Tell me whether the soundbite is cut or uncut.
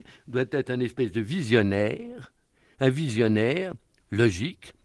uncut